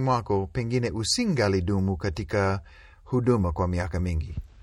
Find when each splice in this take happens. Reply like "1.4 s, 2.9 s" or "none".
none